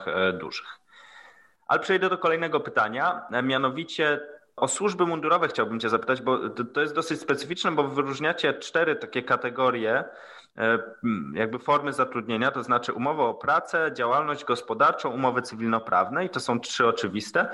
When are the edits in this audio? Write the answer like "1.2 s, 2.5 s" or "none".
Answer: none